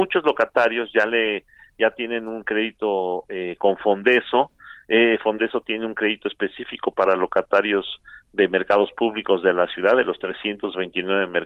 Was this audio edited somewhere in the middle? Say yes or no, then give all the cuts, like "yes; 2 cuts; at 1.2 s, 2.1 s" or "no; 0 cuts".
no; 0 cuts